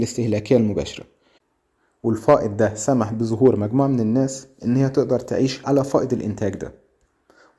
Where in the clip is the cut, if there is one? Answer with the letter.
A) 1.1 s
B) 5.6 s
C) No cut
B